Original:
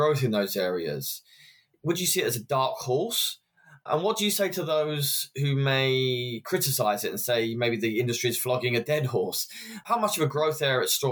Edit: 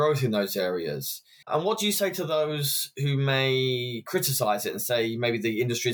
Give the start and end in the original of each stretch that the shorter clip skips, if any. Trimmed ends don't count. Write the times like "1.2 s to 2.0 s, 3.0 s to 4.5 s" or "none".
1.4 s to 3.8 s